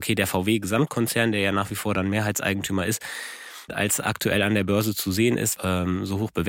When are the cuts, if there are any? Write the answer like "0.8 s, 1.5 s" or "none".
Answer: 3.7 s, 5.6 s